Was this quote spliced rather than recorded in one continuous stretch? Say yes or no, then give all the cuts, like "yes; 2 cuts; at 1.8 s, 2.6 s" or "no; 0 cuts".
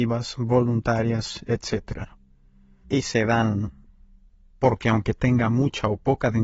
yes; 1 cut; at 2.8 s